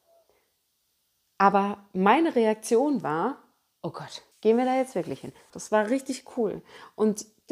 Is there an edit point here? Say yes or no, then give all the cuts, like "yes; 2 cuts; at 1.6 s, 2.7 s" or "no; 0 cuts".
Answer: yes; 2 cuts; at 4.3 s, 5.5 s